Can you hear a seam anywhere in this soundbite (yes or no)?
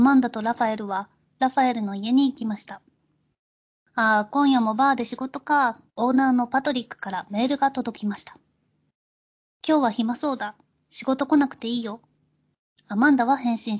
yes